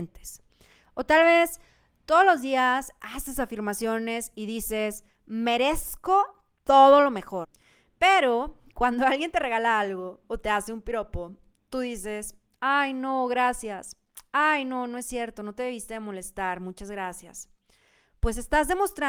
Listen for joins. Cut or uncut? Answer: uncut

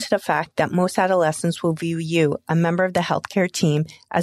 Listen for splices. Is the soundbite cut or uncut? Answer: uncut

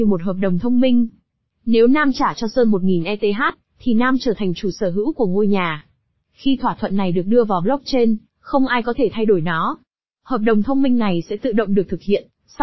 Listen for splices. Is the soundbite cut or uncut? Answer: uncut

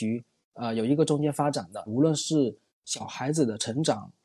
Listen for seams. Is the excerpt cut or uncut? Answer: cut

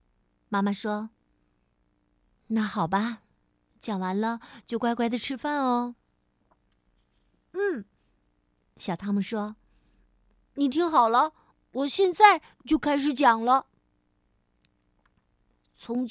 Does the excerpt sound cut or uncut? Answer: uncut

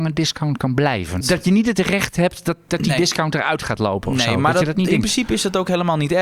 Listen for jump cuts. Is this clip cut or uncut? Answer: cut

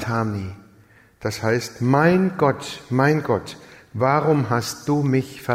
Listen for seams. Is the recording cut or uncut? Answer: uncut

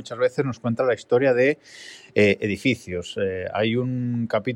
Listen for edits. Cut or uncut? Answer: uncut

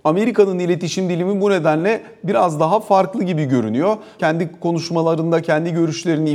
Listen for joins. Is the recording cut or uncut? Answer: cut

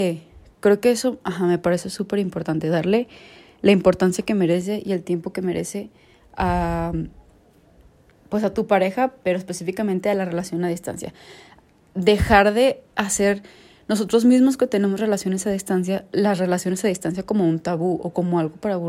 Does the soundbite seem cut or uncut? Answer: cut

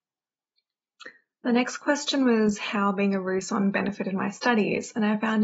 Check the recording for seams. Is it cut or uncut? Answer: uncut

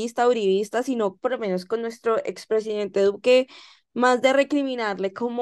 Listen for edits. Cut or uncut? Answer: cut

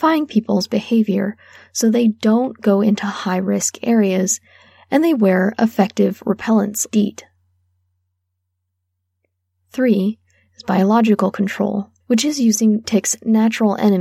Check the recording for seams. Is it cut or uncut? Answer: cut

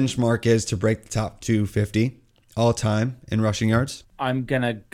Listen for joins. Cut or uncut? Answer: cut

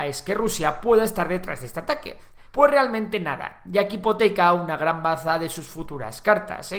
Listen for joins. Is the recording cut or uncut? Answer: cut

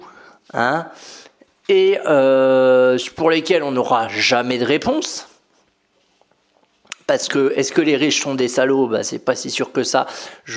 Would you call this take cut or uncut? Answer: uncut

